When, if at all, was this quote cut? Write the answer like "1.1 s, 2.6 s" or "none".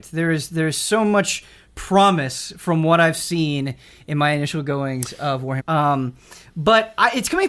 5.6 s